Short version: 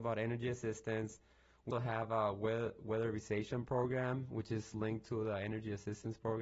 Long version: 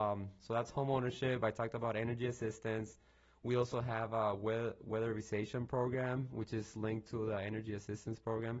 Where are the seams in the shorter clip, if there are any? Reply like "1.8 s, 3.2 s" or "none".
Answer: 1.7 s

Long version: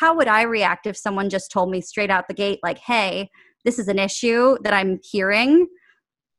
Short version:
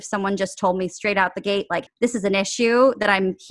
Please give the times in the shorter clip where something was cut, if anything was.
1.9 s

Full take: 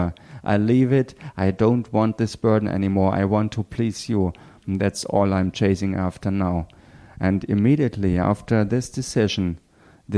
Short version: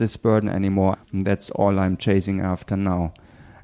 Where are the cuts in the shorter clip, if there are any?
0.9 s

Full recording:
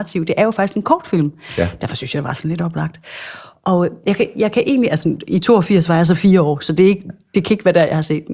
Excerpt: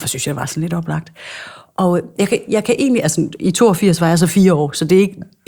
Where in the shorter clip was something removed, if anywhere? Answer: none

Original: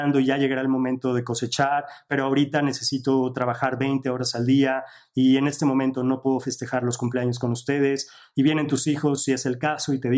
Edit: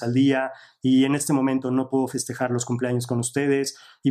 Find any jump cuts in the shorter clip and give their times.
none

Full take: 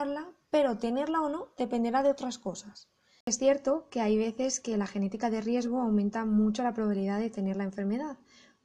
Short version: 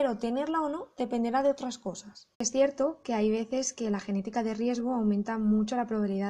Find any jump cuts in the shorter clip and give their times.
2.3 s

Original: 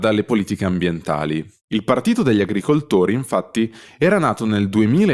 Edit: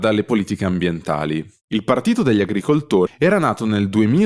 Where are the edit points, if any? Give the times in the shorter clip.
3.1 s

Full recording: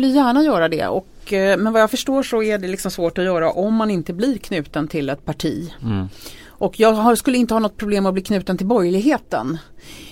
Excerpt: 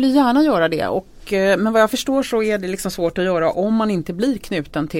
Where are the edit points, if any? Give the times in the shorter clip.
none

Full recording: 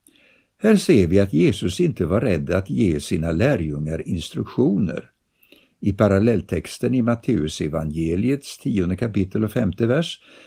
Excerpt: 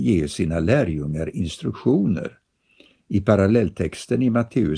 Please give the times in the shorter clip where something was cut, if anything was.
none

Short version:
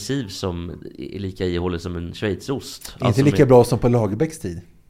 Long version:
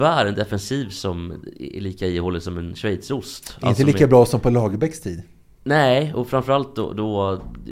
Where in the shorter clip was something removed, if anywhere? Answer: none

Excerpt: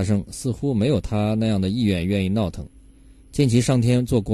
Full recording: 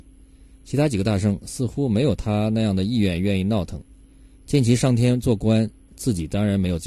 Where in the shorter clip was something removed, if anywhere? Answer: none

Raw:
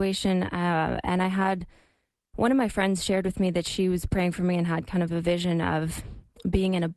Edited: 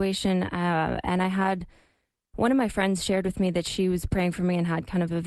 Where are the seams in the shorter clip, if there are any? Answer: none

